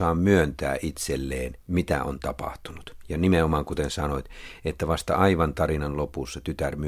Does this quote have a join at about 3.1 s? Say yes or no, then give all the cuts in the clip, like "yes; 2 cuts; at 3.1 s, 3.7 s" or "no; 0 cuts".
no; 1 cut; at 1.6 s